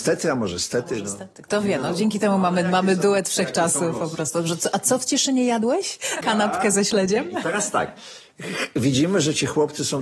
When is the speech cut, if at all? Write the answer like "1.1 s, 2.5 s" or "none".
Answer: 6.2 s